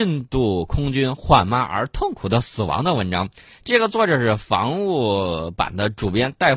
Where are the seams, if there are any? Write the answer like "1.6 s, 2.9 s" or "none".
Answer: none